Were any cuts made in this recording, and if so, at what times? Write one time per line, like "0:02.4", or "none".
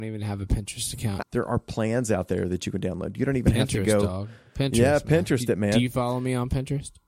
0:01.2